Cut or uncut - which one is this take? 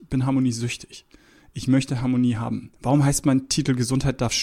cut